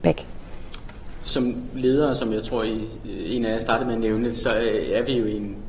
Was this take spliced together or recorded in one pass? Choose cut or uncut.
uncut